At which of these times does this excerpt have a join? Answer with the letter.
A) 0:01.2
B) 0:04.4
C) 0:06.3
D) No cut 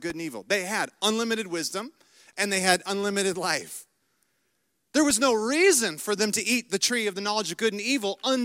D